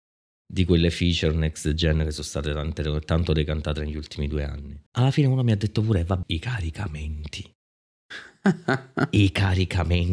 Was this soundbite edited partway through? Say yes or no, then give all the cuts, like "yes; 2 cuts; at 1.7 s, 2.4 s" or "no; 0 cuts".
yes; 2 cuts; at 4.9 s, 6.2 s